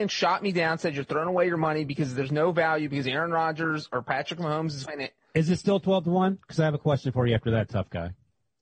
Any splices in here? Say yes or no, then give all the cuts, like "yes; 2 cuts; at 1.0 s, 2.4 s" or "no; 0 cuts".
yes; 1 cut; at 4.9 s